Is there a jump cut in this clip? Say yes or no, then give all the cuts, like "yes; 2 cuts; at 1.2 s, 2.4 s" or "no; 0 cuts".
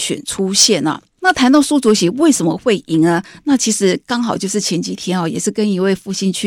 yes; 1 cut; at 1.2 s